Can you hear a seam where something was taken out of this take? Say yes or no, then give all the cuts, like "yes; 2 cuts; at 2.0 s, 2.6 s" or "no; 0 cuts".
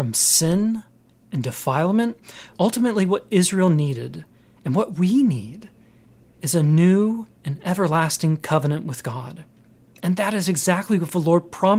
yes; 1 cut; at 2.6 s